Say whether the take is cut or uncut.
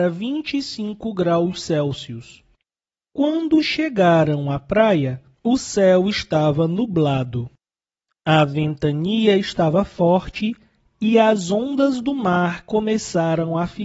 cut